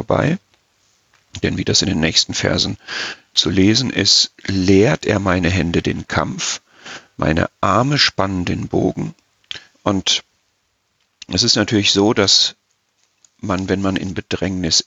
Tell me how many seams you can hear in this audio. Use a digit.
2